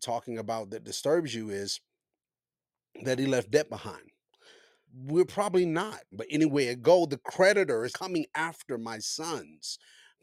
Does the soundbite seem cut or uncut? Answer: cut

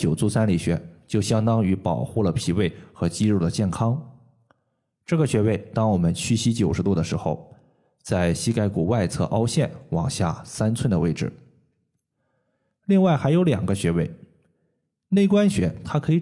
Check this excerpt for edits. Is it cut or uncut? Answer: uncut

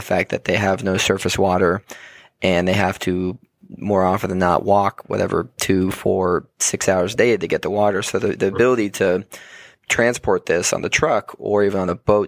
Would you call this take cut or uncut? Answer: uncut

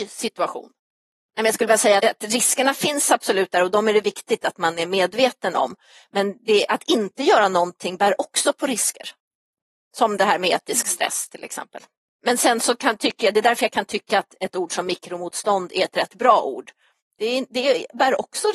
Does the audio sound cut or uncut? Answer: cut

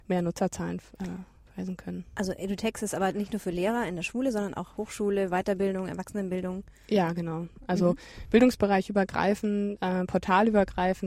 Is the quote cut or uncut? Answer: uncut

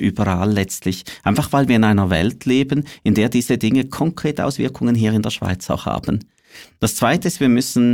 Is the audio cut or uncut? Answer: uncut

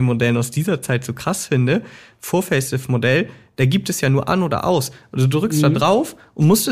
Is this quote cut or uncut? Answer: uncut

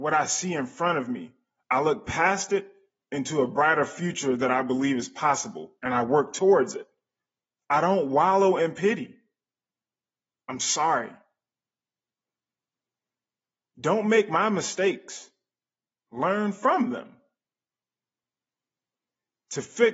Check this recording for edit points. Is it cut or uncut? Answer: uncut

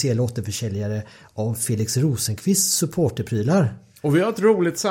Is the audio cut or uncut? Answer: uncut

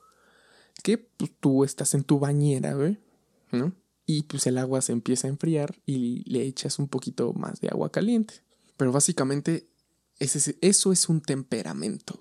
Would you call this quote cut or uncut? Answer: cut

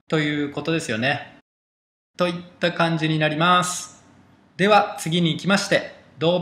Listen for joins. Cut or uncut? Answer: uncut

